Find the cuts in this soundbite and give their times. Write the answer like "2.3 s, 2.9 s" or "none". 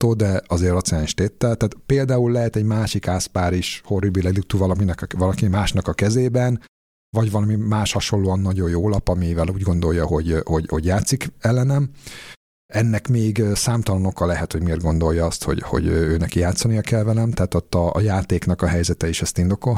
none

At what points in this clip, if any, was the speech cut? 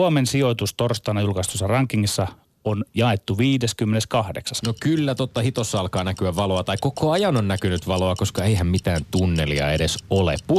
4.6 s

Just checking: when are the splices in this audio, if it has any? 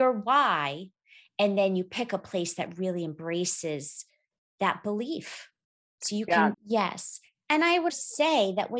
6.5 s, 7.9 s

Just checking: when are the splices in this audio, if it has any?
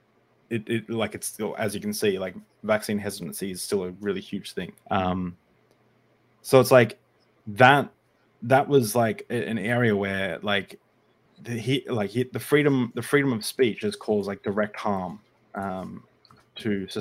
4.8 s

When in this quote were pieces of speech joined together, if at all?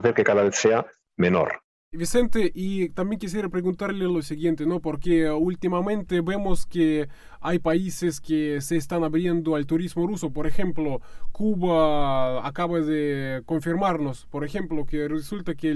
none

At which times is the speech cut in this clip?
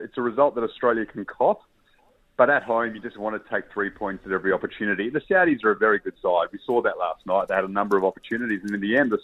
none

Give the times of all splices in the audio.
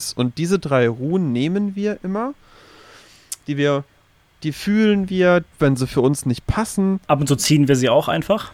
5.5 s, 7.0 s

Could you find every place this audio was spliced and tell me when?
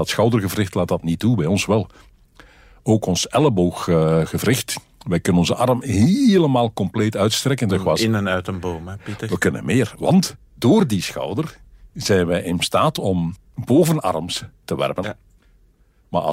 7.7 s, 15.0 s

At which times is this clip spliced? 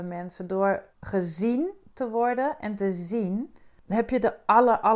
0.9 s

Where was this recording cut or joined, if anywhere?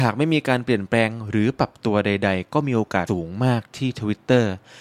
3.1 s

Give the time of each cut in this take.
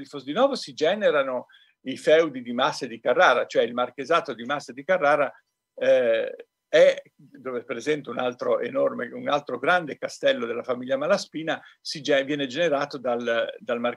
none

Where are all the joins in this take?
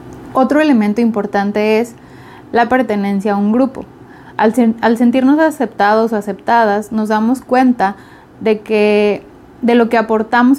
none

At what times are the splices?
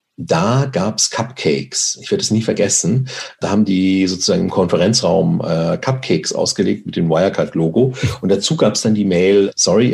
none

